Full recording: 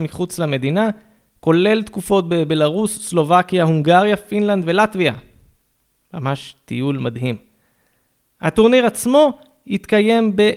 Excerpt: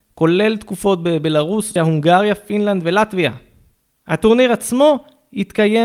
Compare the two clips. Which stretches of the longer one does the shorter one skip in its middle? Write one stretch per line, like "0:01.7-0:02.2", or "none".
0:03.0-0:03.6
0:05.8-0:08.3